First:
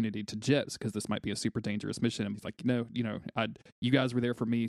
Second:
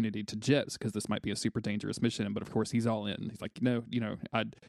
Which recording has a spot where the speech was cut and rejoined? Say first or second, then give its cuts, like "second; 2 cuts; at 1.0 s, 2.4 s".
first; 1 cut; at 2.3 s